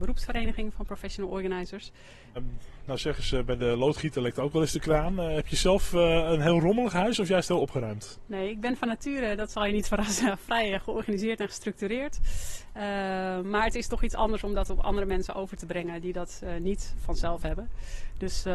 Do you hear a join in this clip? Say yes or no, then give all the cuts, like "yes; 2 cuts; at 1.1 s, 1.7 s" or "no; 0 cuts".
yes; 1 cut; at 2.4 s